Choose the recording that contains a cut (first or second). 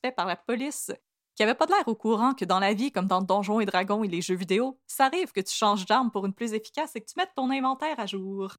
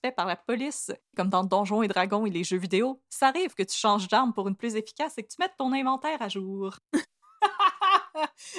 second